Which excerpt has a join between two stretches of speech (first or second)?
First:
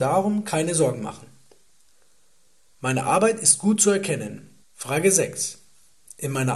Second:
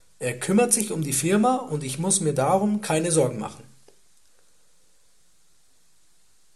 first